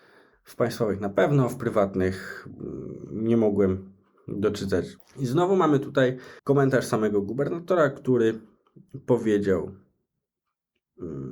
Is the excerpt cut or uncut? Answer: cut